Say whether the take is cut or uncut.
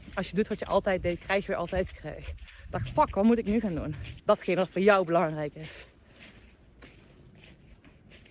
cut